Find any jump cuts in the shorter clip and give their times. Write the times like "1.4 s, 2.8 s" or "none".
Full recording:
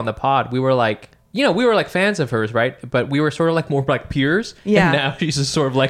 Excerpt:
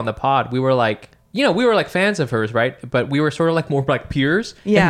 none

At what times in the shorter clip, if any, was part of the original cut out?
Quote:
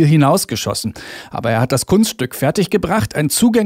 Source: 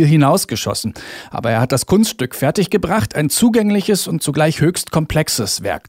none

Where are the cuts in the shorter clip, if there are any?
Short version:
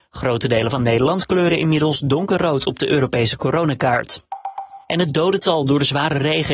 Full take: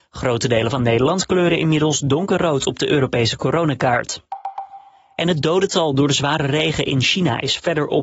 4.8 s

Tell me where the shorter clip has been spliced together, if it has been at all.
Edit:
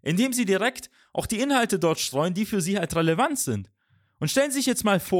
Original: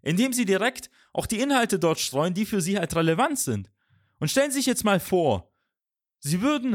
none

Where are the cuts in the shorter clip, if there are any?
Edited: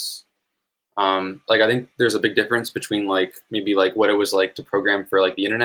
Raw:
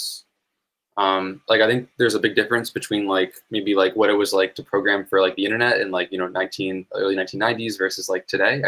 none

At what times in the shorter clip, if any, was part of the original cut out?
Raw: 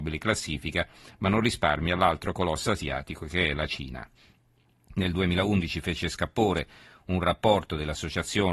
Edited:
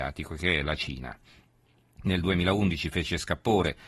none

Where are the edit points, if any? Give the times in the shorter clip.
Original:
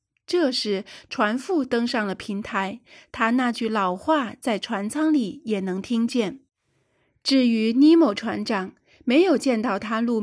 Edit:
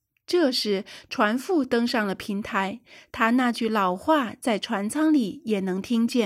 none

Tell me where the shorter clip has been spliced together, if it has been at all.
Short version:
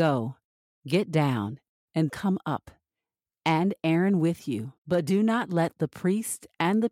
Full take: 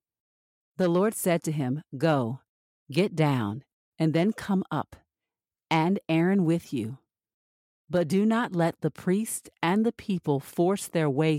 2.1 s, 4.8 s

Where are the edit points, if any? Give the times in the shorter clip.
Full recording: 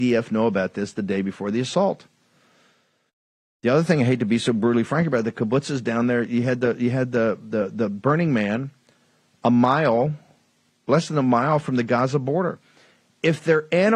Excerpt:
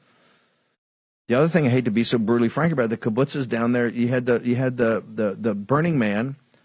none

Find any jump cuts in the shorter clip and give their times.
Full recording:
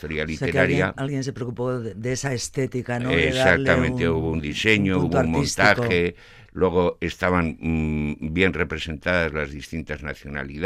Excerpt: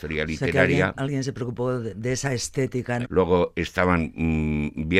3.0 s

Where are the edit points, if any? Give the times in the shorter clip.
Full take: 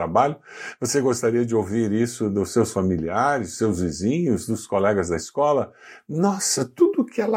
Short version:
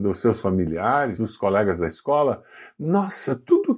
1.2 s

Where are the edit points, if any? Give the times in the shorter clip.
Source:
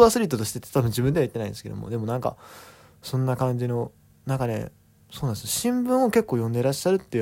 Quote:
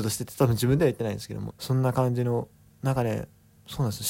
1.5 s

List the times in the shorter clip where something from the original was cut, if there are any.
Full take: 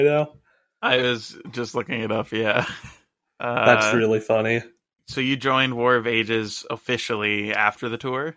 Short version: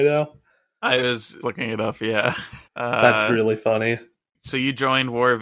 1.4 s, 2.7 s

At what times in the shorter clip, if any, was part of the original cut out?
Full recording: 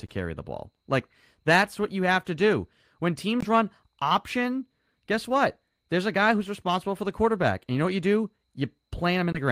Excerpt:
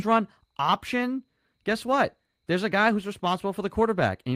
none

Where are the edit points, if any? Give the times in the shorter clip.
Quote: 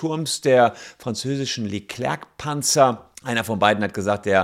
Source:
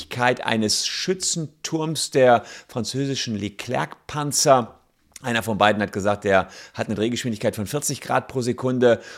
3.1 s

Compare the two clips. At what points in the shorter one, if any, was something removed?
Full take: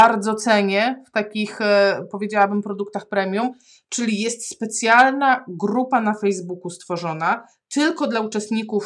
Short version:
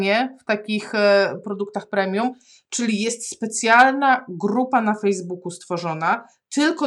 1.4 s

